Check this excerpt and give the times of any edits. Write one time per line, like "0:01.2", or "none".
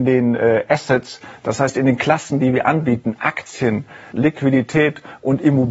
0:04.1